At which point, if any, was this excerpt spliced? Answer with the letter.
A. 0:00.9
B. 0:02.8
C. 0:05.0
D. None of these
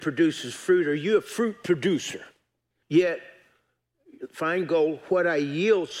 B